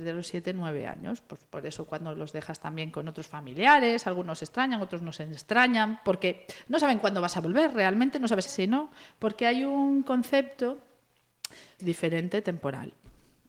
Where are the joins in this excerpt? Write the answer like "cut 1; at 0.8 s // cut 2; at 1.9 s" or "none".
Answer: cut 1; at 8.5 s // cut 2; at 11.8 s

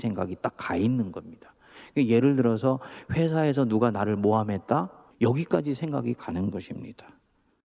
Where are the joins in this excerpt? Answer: cut 1; at 5.1 s

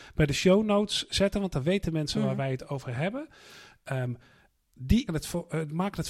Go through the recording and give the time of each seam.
cut 1; at 5.1 s

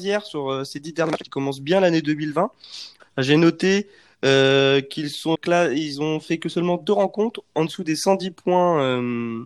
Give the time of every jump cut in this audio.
cut 1; at 3.0 s // cut 2; at 5.3 s

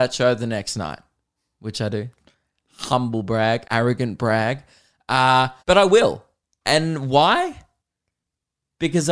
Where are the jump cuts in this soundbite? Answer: cut 1; at 2.2 s // cut 2; at 3.6 s // cut 3; at 5.6 s

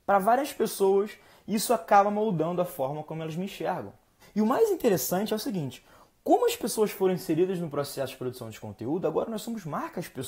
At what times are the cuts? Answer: cut 1; at 4.2 s

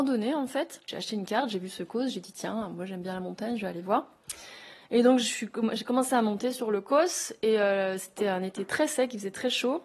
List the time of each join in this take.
none

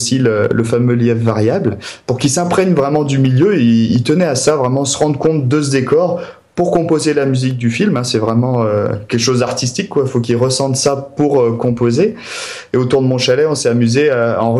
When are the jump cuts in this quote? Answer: none

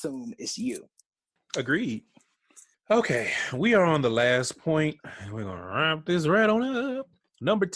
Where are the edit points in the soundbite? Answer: none

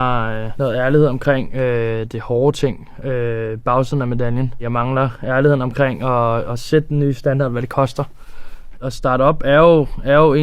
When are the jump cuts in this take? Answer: cut 1; at 8.8 s

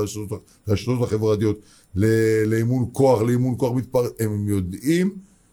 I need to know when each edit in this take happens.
none

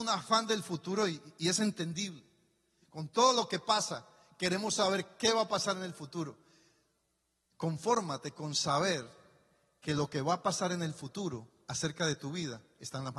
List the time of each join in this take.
none

